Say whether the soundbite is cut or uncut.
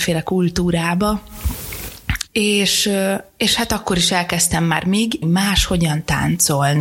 cut